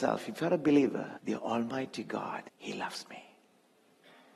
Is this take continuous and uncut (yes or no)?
no